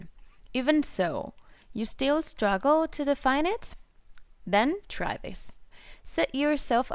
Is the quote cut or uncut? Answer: uncut